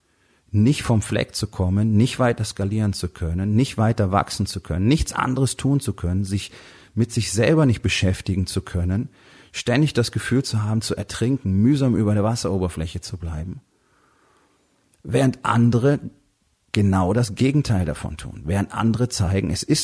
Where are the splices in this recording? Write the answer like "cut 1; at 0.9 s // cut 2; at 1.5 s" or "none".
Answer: none